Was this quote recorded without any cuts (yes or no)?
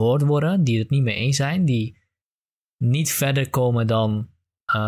yes